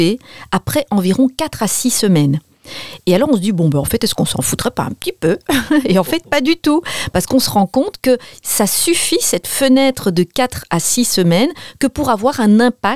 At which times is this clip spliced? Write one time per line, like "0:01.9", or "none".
none